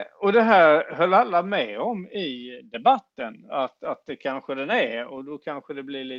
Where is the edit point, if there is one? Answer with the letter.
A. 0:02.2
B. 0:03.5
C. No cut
B